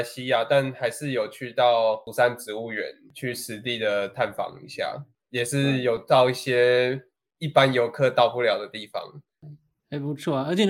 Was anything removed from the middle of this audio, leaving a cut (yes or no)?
no